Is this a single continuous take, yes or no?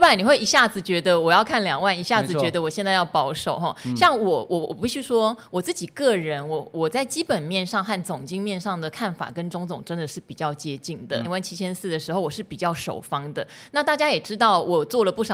no